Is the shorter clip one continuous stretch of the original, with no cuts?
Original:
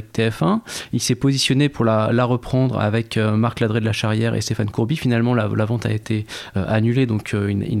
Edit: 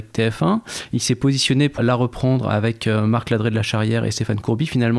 no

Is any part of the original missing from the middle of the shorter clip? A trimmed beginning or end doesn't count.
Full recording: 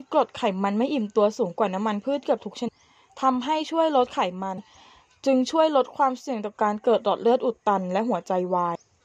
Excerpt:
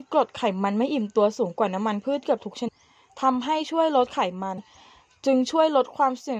no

